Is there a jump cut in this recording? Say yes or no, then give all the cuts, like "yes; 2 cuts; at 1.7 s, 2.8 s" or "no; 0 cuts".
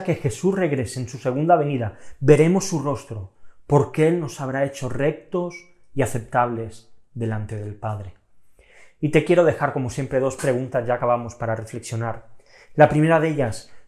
no; 0 cuts